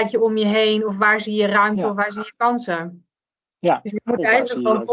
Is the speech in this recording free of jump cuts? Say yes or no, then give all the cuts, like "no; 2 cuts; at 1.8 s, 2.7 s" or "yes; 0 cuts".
yes; 0 cuts